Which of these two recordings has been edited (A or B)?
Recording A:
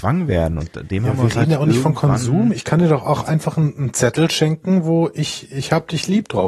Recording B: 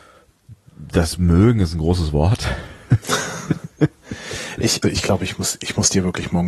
B